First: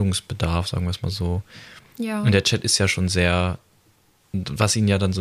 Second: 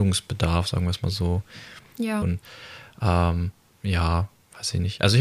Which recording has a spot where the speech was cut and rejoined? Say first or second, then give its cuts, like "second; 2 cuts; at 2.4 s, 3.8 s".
second; 1 cut; at 2.2 s